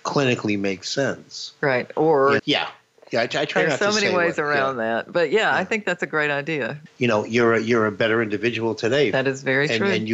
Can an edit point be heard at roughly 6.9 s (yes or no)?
yes